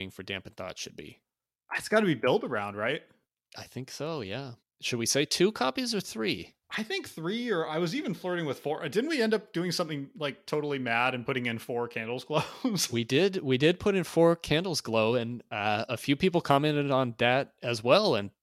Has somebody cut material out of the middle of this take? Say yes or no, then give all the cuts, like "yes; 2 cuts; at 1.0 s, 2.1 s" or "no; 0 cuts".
no; 0 cuts